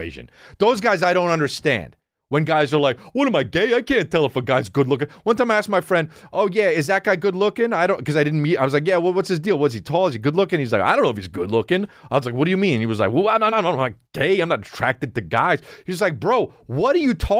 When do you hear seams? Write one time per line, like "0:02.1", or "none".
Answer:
none

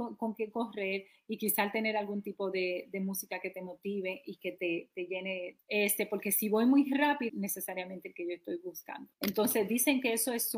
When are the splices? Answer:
0:05.6
0:07.3
0:09.1

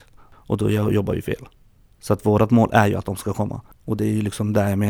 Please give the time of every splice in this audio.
none

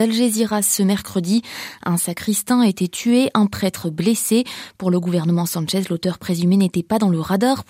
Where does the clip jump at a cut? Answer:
none

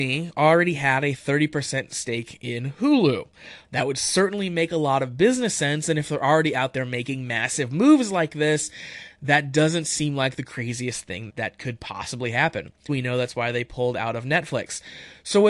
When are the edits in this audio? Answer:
0:03.6
0:11.3
0:12.9

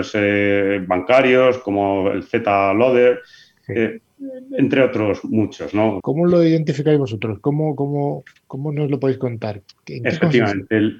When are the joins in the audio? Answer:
0:06.0

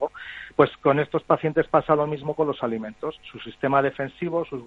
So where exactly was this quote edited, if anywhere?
none

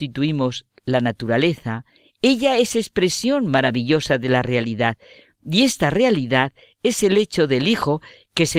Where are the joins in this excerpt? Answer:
none

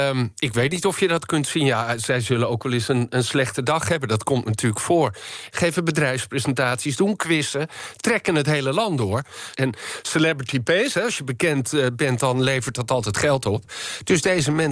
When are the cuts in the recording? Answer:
0:05.5
0:09.5

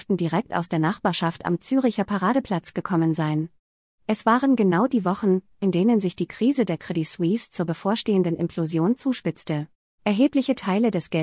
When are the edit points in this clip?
0:10.0

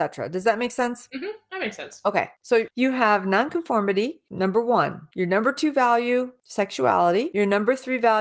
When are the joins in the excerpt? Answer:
none

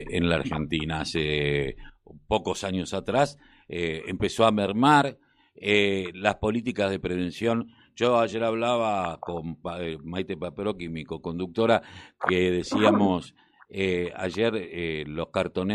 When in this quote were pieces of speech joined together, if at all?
none

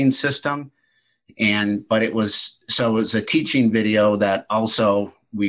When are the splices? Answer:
none

